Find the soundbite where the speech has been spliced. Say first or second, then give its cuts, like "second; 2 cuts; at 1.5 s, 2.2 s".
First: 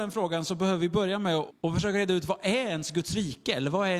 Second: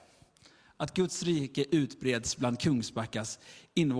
first; 1 cut; at 1.5 s